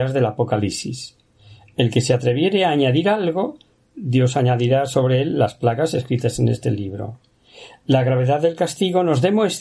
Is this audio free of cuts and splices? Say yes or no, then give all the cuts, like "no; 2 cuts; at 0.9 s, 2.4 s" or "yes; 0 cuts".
yes; 0 cuts